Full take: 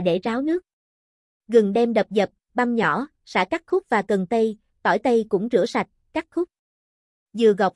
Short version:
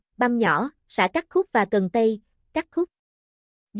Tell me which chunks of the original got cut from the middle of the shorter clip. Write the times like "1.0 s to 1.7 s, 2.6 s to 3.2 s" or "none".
4.7 s to 6.0 s